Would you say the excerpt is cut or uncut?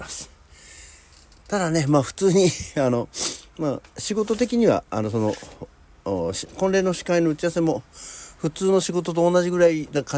uncut